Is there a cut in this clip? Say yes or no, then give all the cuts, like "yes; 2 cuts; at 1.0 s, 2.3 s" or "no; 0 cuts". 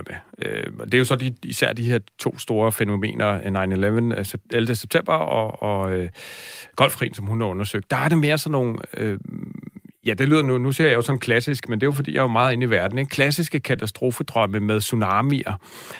no; 0 cuts